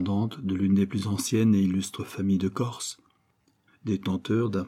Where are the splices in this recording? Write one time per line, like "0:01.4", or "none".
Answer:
0:03.7